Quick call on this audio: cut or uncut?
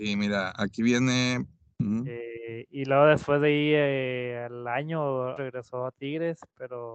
cut